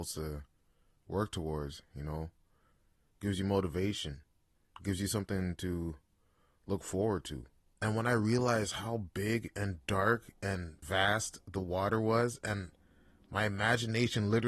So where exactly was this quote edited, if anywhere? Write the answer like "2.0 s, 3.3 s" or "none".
7.8 s, 10.8 s